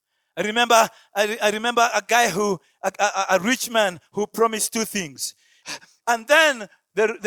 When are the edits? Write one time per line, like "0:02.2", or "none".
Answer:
0:05.6